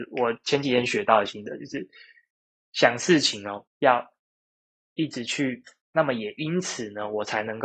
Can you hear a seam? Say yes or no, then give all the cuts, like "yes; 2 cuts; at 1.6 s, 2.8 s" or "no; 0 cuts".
yes; 2 cuts; at 3.7 s, 5.9 s